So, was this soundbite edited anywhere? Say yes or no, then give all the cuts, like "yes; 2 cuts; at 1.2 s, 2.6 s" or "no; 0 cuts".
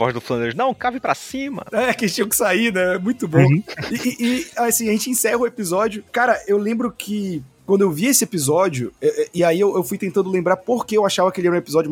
no; 0 cuts